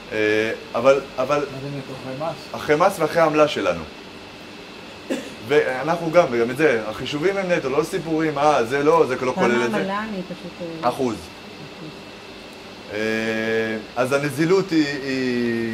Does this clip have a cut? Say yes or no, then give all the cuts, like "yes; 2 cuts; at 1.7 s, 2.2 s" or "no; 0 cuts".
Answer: no; 0 cuts